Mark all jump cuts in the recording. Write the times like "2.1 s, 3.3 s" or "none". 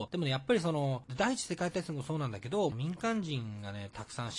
1.0 s, 2.7 s